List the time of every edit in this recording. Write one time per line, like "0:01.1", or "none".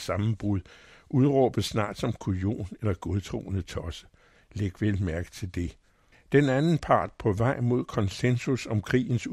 0:06.1